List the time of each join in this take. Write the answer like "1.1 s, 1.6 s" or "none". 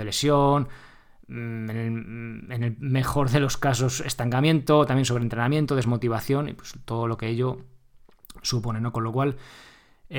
none